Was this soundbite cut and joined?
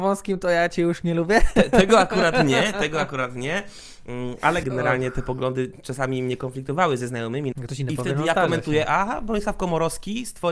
yes; 2 cuts; at 4.6 s, 7.5 s

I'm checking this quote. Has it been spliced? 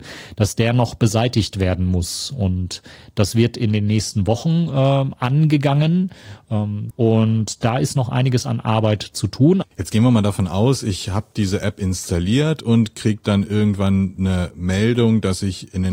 yes; 2 cuts; at 6.9 s, 9.6 s

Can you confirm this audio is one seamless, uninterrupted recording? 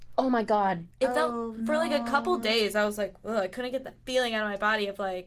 yes; 0 cuts

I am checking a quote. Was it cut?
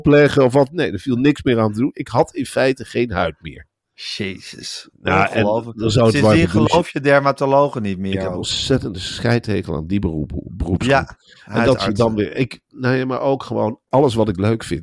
no; 0 cuts

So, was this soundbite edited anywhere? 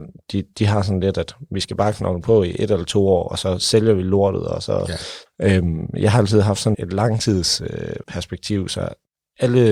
yes; 3 cuts; at 5.3 s, 6.7 s, 8.0 s

